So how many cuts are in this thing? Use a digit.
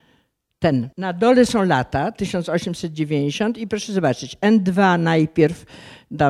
1